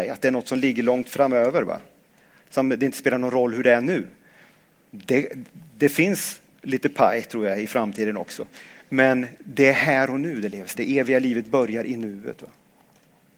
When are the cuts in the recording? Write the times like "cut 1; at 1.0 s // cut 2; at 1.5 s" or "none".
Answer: cut 1; at 10.7 s